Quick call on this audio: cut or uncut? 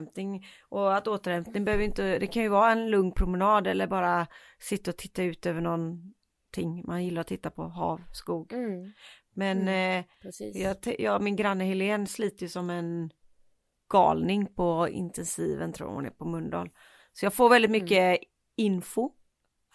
uncut